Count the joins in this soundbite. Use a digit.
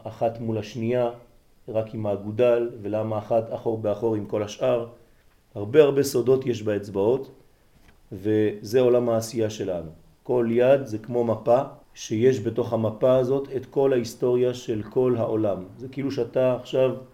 2